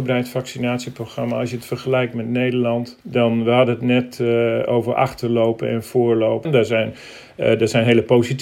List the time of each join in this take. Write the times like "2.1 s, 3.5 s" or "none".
3.0 s, 6.4 s